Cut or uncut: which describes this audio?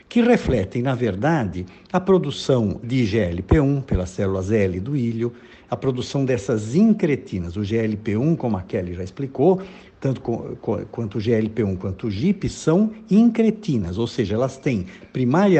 uncut